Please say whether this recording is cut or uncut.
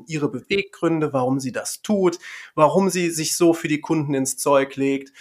uncut